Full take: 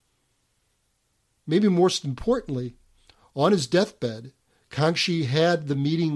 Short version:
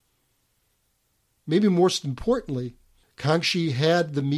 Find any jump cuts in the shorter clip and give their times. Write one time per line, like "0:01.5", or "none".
0:03.0

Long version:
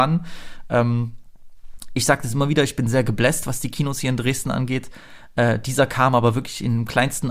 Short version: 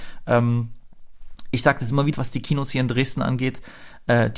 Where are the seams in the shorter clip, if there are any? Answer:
0:02.1

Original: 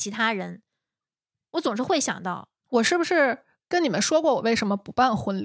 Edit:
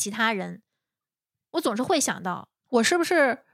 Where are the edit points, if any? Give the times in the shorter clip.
none

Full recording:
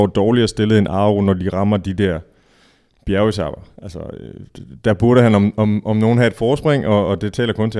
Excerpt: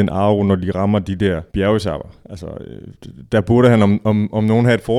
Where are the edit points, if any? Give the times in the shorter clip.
0:01.5

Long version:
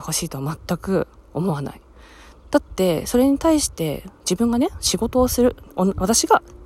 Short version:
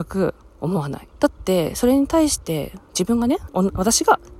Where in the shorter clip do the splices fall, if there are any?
0:01.1
0:03.5

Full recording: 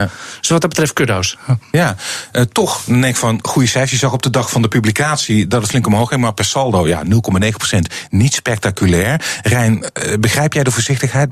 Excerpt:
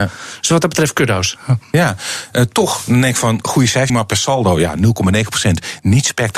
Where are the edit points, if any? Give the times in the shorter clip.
0:03.9

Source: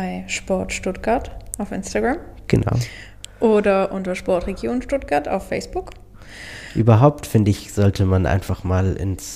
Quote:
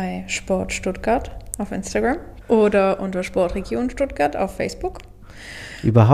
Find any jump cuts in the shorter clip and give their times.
0:02.4

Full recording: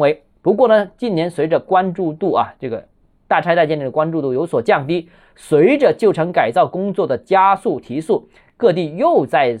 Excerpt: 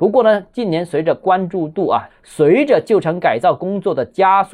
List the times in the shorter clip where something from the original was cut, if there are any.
0:02.1

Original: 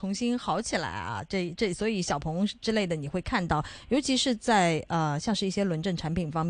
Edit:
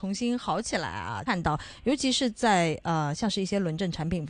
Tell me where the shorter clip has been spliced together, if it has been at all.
0:01.3

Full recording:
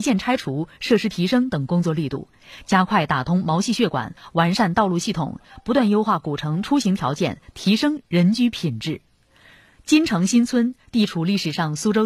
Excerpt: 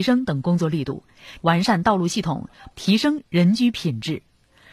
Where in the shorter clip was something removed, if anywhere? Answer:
0:01.4
0:02.7

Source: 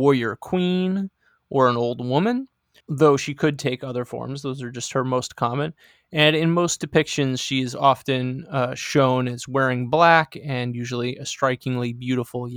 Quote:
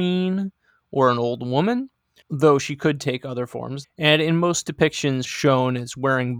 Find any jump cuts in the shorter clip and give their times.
0:03.8
0:05.2

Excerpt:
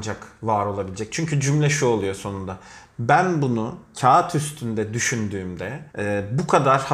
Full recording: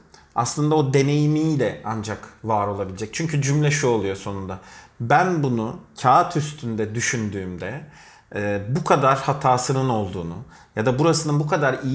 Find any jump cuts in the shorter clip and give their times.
0:05.9

